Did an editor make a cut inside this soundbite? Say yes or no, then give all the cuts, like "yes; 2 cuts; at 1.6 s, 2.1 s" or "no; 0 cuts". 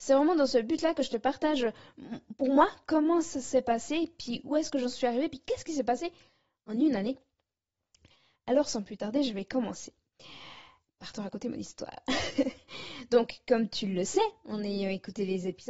no; 0 cuts